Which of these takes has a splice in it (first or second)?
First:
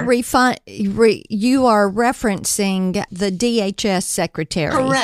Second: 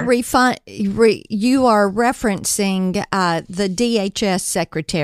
first